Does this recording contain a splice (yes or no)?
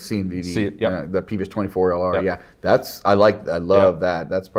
no